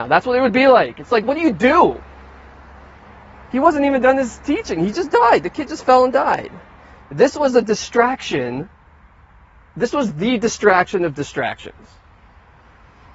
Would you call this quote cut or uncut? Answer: cut